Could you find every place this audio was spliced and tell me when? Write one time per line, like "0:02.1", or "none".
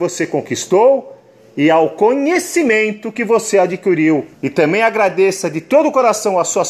0:04.3